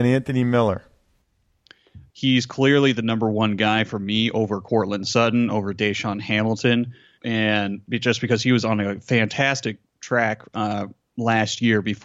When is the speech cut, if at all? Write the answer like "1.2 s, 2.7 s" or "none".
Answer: 2.1 s, 7.2 s